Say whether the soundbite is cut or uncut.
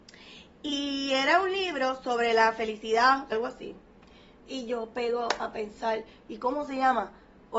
cut